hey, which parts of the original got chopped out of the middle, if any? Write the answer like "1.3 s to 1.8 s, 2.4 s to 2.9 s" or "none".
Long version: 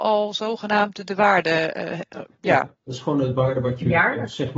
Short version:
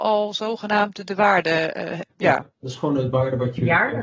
2.1 s to 2.3 s